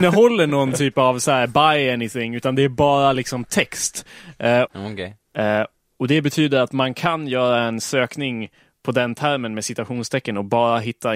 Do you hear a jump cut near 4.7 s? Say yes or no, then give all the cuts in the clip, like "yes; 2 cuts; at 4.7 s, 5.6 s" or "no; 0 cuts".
yes; 1 cut; at 4.7 s